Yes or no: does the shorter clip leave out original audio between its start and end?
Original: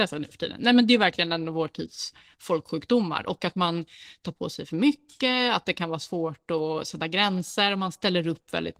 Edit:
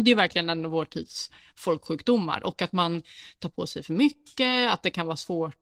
no